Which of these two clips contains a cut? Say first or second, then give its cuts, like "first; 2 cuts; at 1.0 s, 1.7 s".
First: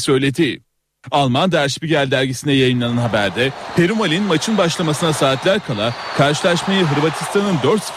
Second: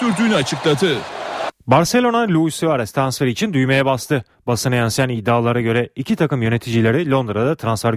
second; 1 cut; at 1.6 s